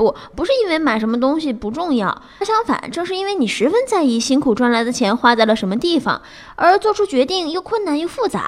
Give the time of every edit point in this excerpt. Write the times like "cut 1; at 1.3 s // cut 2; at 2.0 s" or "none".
cut 1; at 2.4 s